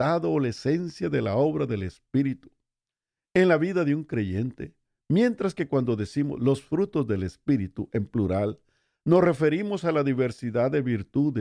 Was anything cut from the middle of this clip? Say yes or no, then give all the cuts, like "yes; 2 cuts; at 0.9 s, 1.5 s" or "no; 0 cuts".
no; 0 cuts